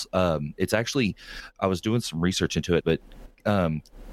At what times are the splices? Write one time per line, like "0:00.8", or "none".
0:02.8